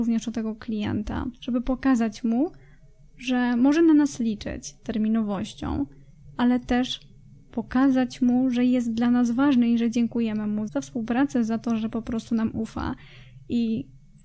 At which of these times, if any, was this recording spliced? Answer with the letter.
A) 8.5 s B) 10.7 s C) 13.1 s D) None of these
B